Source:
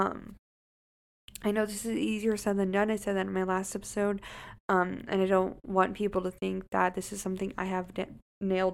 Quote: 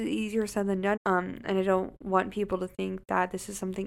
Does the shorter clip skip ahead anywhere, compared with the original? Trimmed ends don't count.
yes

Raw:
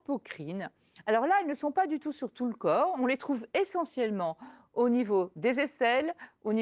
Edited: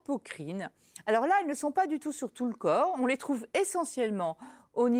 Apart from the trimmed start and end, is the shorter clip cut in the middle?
no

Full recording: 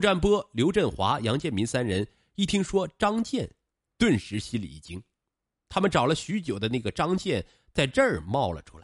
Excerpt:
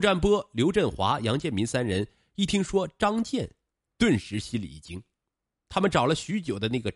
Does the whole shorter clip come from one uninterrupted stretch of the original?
yes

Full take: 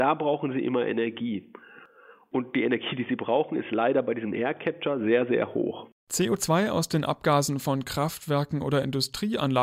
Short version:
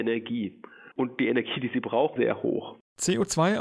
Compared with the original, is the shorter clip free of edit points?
no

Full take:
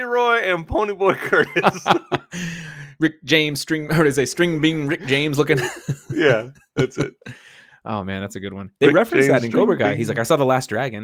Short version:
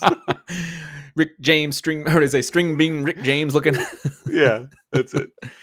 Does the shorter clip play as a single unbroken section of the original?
yes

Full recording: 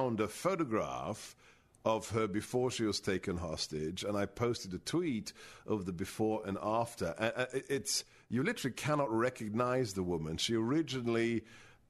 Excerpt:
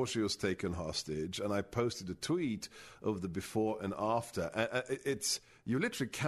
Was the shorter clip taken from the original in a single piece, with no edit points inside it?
yes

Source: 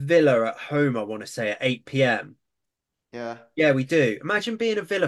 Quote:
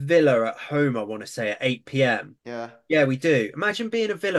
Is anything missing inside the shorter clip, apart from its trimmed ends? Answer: yes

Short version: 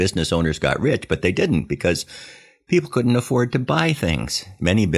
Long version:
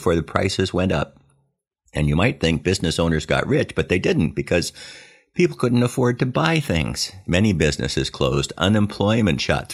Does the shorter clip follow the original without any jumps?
yes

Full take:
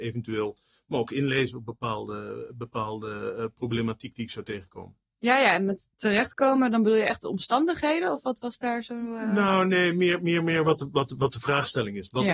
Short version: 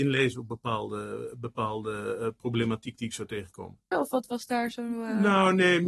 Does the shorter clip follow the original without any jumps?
no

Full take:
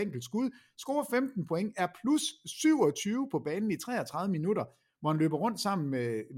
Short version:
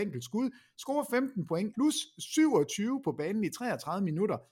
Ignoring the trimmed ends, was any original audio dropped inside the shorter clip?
yes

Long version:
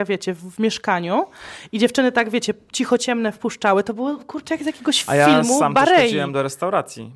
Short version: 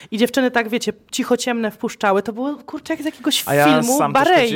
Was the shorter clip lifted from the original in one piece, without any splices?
yes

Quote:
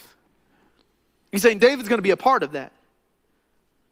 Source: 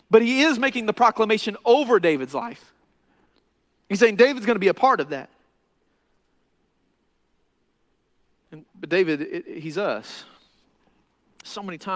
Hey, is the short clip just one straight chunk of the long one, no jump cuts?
yes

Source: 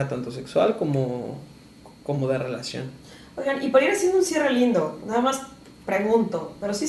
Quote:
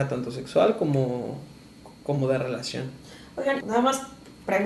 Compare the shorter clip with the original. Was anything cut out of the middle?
yes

